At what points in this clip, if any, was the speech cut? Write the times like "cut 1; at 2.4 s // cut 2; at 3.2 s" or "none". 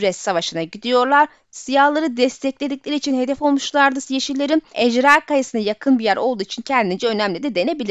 none